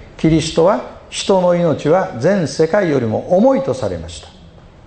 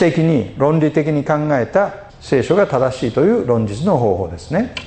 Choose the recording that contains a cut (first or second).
second